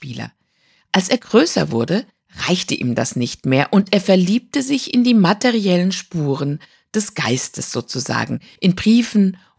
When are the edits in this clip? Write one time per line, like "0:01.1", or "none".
0:08.6